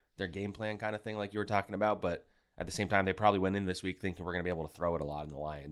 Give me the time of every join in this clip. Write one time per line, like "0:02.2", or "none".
none